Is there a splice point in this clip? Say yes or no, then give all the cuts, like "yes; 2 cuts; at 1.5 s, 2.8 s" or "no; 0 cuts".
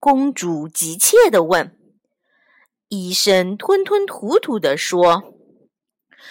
no; 0 cuts